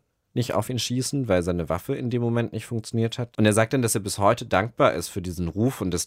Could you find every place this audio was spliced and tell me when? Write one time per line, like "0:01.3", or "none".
0:03.3